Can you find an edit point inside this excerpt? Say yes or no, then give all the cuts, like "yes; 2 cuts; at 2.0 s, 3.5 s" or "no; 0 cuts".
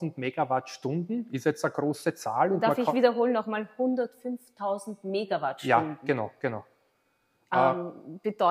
no; 0 cuts